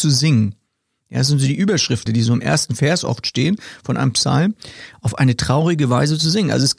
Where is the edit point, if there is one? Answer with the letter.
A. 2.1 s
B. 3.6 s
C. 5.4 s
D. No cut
A